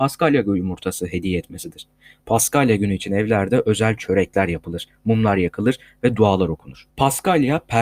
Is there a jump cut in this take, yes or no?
yes